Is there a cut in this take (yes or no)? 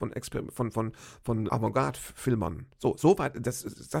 yes